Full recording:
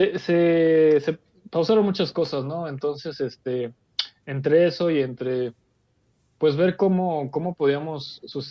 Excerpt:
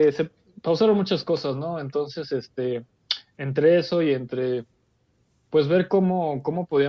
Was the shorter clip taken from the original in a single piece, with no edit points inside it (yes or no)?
yes